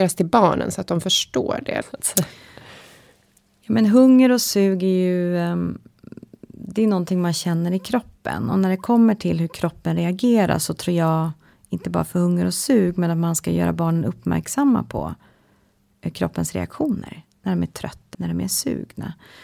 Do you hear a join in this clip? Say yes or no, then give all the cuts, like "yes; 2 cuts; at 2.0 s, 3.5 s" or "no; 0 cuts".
yes; 2 cuts; at 1.8 s, 18.1 s